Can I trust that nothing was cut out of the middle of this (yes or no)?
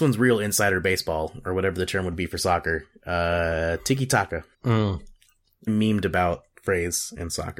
no